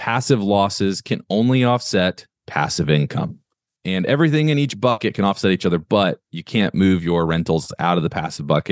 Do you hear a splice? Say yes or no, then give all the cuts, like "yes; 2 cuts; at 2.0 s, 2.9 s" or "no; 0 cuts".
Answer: yes; 2 cuts; at 3.8 s, 6.2 s